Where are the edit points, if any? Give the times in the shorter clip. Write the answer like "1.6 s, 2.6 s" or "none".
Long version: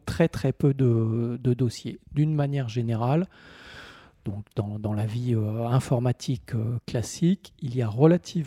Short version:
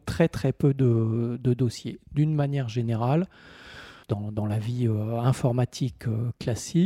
4.0 s